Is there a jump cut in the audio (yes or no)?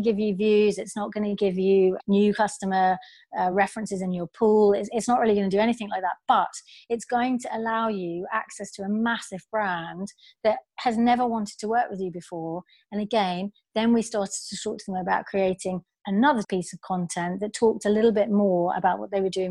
no